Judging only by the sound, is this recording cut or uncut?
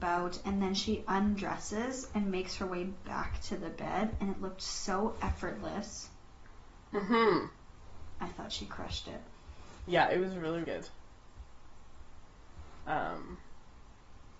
cut